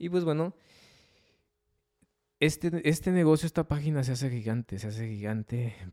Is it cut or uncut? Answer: uncut